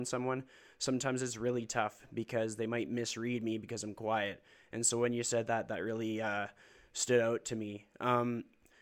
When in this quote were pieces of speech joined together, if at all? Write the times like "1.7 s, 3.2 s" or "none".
none

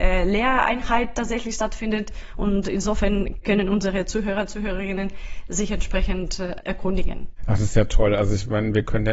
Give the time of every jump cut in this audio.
none

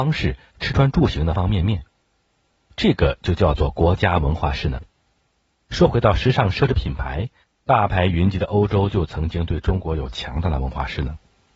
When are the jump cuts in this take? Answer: 1.3 s

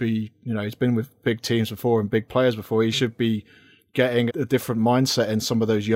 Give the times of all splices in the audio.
4.3 s

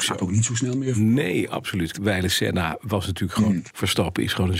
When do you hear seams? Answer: 1.9 s, 3.7 s

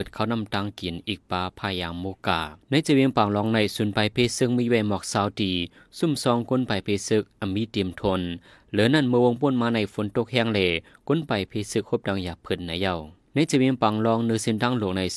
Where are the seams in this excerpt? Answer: 2.6 s, 13.3 s

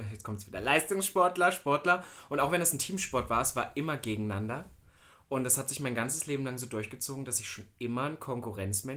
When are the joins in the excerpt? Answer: none

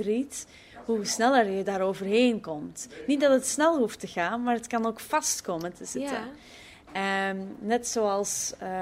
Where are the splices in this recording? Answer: none

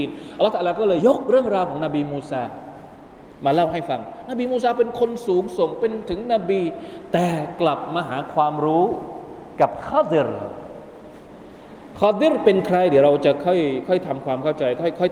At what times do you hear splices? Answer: 1.0 s

